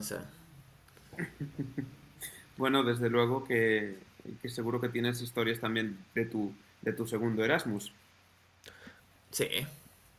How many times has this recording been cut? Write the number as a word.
zero